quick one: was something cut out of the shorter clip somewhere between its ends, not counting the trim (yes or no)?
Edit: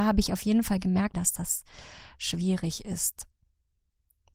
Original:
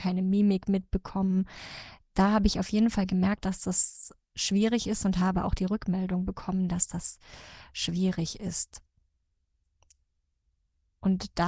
yes